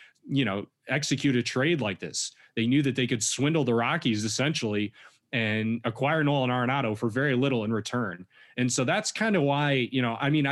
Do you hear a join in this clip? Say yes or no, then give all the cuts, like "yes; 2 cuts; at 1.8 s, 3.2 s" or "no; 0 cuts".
no; 0 cuts